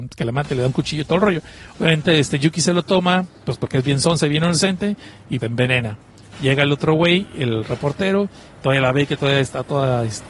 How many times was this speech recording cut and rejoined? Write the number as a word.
two